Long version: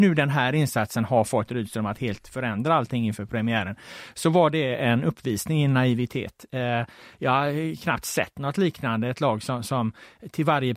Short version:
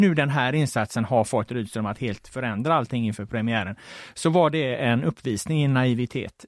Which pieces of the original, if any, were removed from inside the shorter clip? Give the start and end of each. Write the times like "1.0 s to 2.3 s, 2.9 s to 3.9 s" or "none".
none

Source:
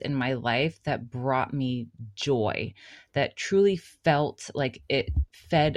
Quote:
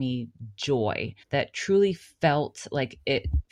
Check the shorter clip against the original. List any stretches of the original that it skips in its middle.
2.8 s to 3.0 s

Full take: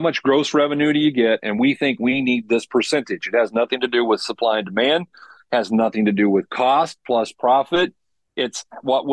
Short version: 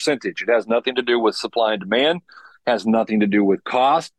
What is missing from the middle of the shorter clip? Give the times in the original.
none

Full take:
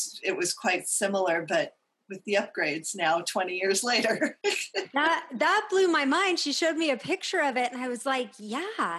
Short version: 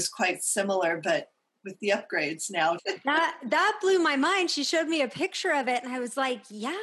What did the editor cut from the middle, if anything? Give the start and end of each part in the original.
3.2 s to 4.7 s

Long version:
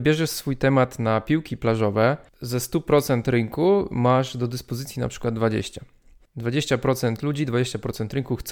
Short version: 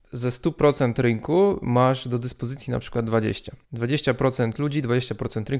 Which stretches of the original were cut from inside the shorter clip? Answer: 5.9 s to 6.3 s

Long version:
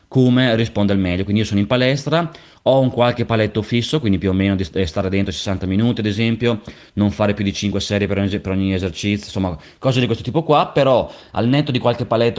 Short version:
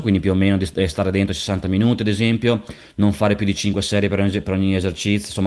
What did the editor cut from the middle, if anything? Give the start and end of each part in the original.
none

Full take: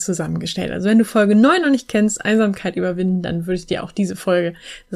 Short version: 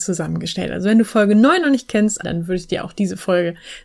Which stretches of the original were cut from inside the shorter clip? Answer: 2.2 s to 3.2 s

